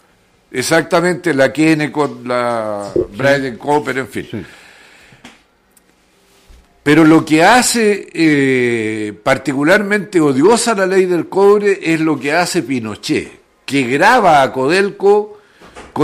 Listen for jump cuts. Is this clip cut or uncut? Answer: uncut